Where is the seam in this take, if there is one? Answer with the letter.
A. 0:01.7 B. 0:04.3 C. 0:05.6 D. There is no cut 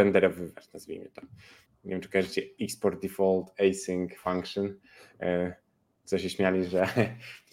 A